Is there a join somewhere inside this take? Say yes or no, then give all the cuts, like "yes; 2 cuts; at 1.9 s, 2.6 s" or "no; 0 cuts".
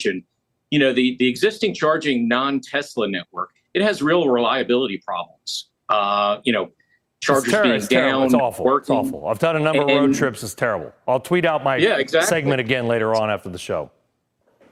no; 0 cuts